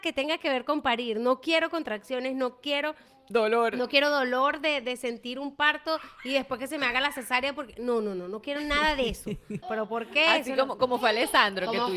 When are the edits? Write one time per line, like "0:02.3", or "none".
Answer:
0:09.6

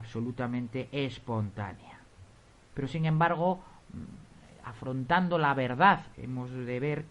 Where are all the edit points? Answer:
0:02.7
0:06.1

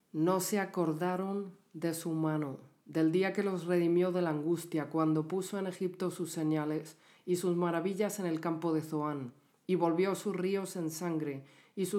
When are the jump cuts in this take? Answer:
none

